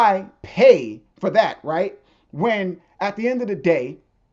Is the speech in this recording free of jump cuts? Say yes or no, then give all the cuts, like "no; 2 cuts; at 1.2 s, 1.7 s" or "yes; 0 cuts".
yes; 0 cuts